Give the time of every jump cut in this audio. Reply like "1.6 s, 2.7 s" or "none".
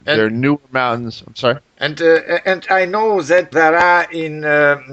1.7 s, 3.5 s

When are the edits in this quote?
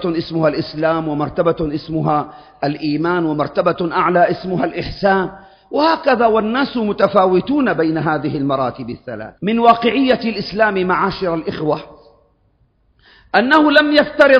9.4 s

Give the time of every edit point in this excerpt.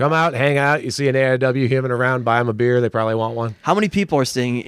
none

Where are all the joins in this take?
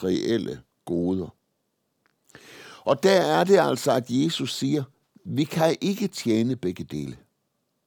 none

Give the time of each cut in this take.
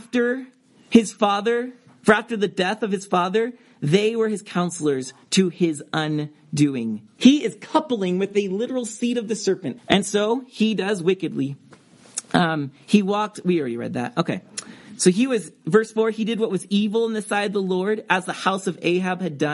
7.2 s, 9.8 s

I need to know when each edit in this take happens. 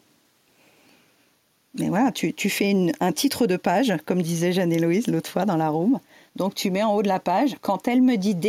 6.3 s

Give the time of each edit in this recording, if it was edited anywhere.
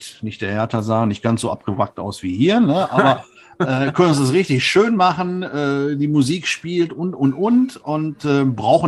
none

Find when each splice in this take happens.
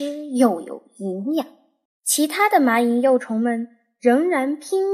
1.9 s

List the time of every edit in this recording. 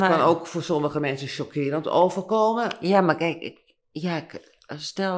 none

